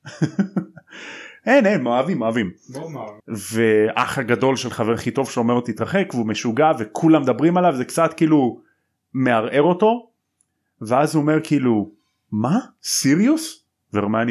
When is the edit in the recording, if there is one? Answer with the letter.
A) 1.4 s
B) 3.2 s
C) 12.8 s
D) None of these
B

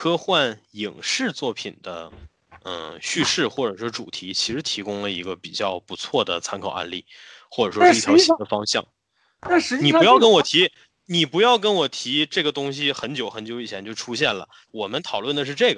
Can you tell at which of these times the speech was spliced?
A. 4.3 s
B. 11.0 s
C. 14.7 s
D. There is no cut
C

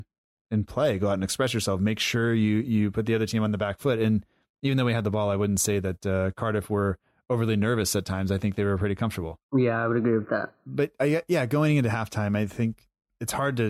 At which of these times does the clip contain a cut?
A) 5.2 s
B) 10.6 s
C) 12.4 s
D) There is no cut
D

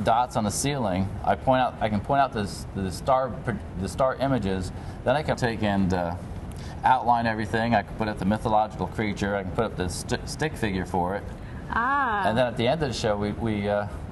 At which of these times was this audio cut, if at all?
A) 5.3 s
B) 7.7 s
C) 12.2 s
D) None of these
A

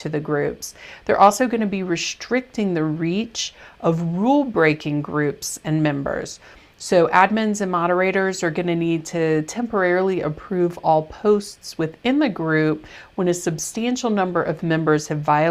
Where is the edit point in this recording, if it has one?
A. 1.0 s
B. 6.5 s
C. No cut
C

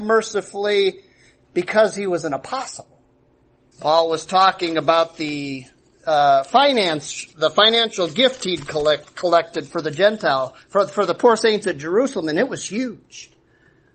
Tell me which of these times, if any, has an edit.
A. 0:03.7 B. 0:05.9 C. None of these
A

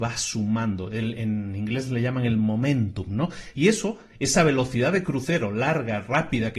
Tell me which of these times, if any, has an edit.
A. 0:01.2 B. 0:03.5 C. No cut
B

